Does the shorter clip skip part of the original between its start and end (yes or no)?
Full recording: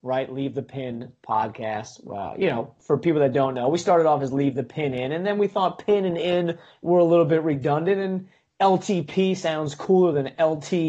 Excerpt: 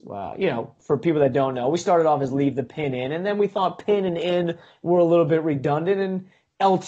no